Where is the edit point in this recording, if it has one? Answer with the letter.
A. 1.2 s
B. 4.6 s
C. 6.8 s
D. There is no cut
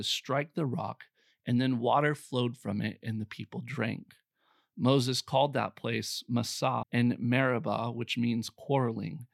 C